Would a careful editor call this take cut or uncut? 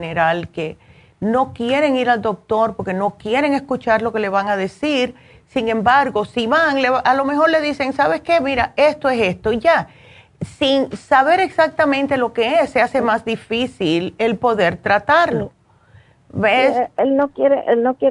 uncut